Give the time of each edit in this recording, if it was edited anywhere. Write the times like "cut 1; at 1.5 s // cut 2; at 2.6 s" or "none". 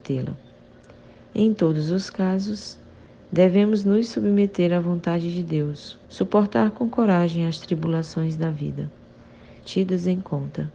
cut 1; at 6.0 s // cut 2; at 9.6 s

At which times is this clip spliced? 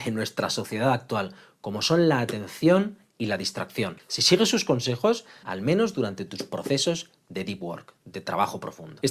cut 1; at 4.0 s // cut 2; at 5.4 s

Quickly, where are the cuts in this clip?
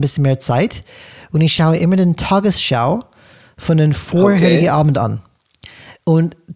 none

